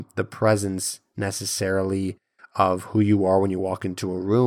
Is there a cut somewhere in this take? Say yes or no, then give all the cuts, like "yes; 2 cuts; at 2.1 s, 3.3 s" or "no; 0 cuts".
no; 0 cuts